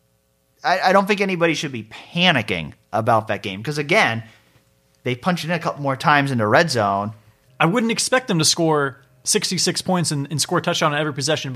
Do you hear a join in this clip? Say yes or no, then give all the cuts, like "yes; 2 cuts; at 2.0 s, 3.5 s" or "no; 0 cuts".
yes; 1 cut; at 7.5 s